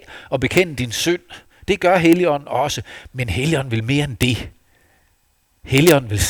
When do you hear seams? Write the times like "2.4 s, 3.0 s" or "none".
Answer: none